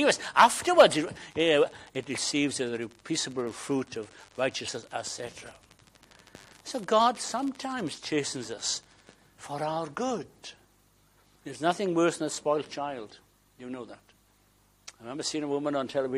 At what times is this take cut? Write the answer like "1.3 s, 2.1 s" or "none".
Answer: none